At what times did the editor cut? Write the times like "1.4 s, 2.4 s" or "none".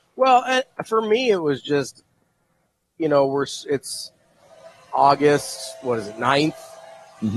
none